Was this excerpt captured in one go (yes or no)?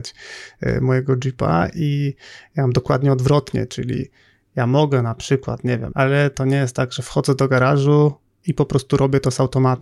no